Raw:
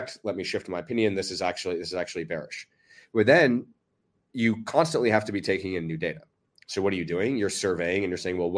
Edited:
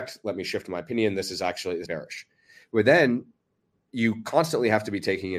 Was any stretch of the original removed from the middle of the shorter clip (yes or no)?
yes